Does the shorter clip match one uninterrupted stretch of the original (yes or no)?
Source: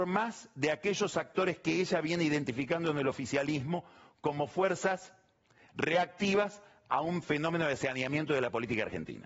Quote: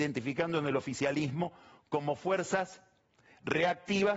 yes